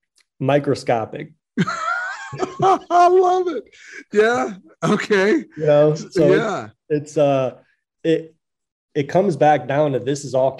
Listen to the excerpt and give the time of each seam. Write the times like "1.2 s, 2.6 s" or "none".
none